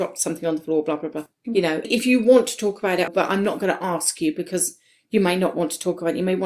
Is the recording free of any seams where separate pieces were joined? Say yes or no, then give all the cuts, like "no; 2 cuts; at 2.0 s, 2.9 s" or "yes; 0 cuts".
no; 2 cuts; at 1.8 s, 3.1 s